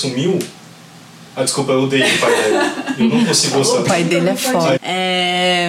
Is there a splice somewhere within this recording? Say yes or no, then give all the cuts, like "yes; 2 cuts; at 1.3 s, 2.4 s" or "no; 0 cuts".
yes; 1 cut; at 4.8 s